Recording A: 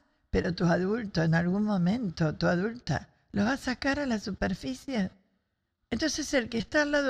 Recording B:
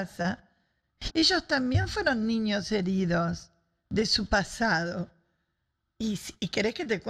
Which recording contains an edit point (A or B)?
B